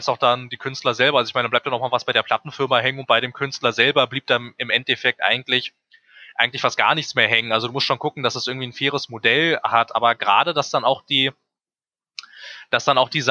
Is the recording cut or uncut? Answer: uncut